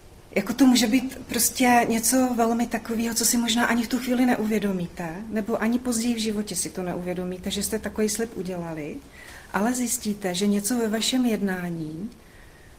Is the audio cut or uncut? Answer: uncut